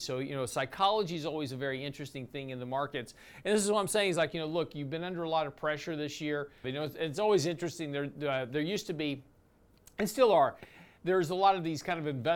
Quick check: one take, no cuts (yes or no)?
no